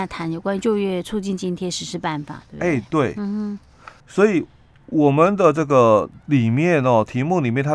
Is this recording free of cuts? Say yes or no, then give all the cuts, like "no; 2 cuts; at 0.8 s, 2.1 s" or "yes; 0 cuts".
no; 1 cut; at 4.0 s